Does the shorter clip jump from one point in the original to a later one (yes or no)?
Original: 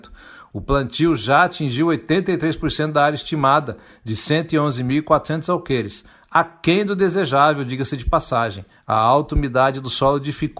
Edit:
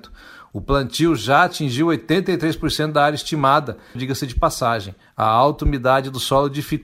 yes